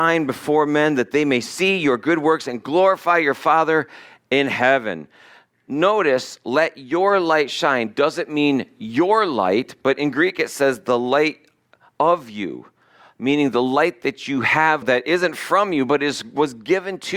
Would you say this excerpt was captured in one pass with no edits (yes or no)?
no